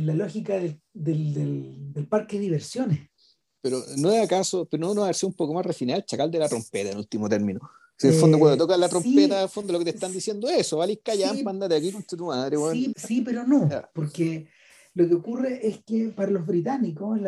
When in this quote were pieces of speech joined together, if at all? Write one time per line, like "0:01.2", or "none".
0:12.9